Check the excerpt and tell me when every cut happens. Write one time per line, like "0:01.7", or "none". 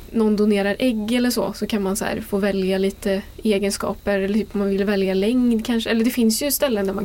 none